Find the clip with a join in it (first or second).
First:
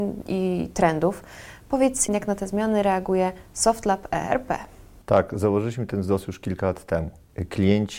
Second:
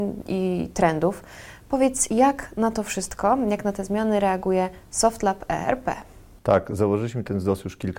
first